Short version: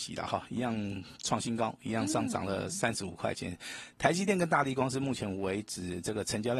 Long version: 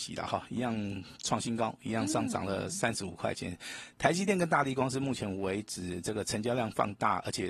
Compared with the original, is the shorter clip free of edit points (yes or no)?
yes